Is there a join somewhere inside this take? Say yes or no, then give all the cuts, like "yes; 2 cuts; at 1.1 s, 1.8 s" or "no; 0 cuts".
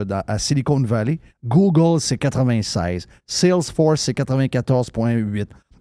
yes; 1 cut; at 1.3 s